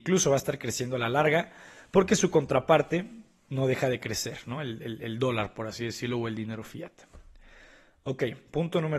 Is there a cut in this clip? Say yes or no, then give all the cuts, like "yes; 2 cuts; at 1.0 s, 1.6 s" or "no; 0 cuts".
no; 0 cuts